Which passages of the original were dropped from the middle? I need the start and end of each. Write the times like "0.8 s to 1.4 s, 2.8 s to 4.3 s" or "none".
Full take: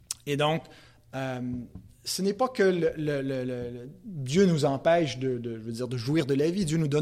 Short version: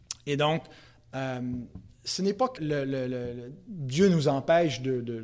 2.6 s to 2.9 s